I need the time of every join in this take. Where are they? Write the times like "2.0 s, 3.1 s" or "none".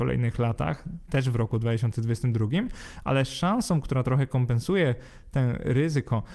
none